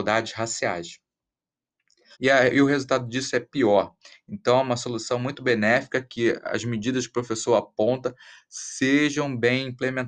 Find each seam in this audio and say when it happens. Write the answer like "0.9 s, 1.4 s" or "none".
2.1 s